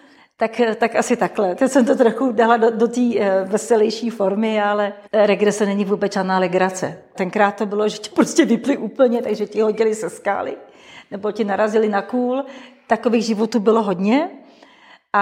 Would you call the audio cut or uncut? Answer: cut